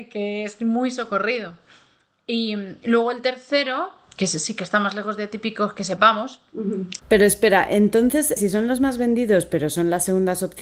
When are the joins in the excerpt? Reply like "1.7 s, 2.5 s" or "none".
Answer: 7.0 s, 8.4 s